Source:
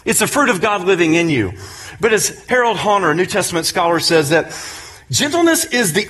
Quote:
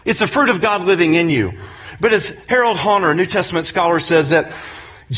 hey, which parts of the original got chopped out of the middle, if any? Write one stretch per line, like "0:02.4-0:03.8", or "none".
none